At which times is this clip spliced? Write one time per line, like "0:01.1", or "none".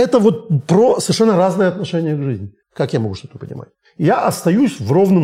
0:02.6